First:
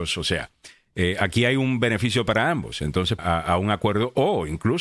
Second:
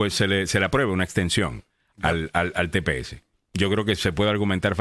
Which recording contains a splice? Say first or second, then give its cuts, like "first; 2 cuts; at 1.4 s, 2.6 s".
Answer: first; 1 cut; at 3.2 s